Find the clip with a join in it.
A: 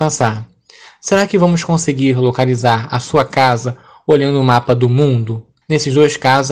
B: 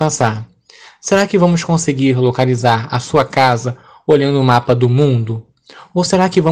A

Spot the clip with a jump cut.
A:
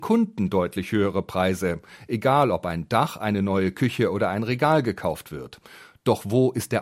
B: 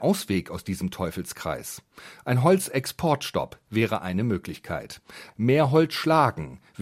B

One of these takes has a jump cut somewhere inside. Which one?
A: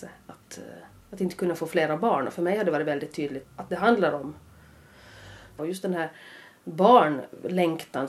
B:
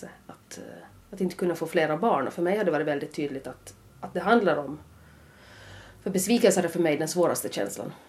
A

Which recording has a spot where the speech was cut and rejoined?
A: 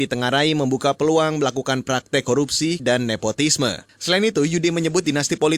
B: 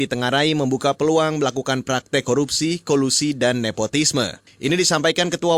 A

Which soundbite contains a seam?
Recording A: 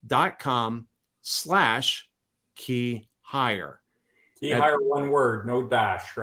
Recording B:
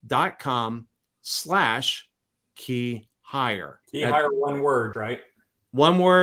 B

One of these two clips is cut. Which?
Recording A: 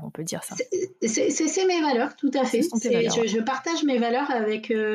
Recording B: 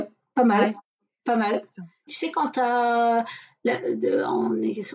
B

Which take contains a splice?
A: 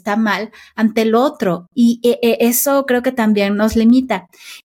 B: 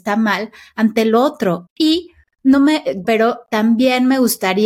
B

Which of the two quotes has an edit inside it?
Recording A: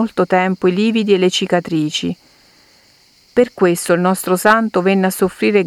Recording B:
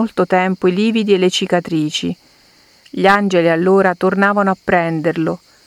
B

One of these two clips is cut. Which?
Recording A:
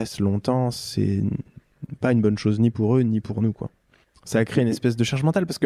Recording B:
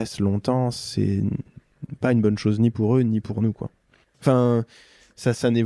B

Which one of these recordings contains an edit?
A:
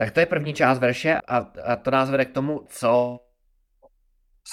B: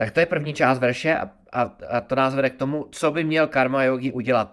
A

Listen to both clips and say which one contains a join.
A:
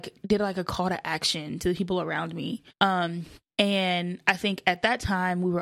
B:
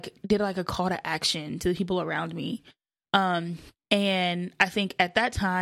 A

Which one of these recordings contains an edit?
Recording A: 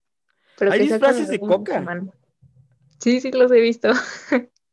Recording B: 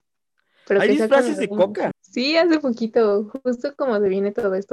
B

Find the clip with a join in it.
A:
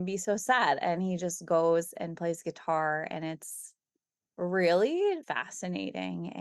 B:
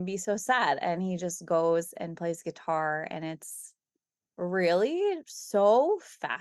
A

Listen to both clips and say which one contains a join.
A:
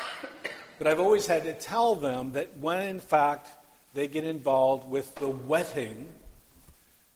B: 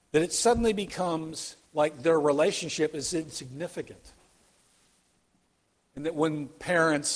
B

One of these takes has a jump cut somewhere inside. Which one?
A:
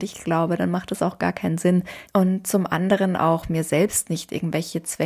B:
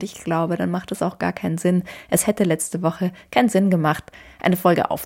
A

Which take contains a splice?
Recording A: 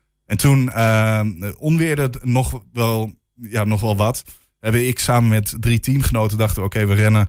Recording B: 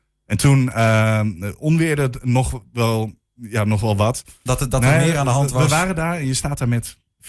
B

